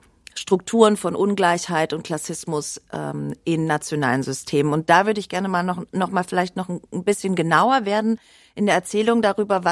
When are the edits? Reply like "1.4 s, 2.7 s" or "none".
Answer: none